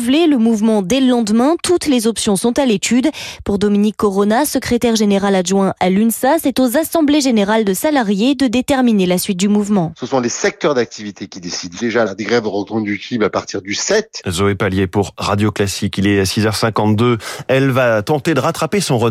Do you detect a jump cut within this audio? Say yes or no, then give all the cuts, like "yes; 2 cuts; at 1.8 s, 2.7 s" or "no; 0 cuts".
yes; 2 cuts; at 12.1 s, 14.2 s